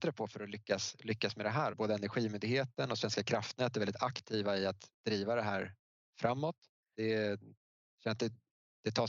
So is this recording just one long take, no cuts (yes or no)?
no